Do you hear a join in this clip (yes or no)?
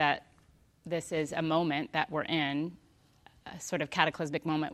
no